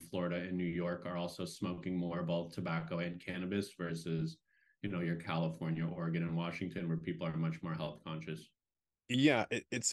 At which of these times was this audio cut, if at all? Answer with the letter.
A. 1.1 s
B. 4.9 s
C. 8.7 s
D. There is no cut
D